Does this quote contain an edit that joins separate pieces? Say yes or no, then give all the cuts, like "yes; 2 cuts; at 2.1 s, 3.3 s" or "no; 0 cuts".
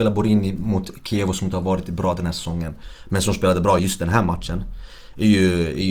no; 0 cuts